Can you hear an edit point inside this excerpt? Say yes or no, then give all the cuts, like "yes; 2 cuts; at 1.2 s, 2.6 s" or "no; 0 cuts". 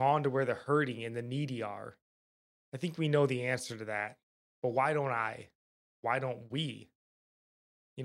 no; 0 cuts